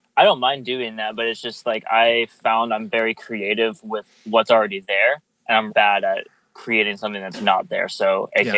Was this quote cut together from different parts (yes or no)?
yes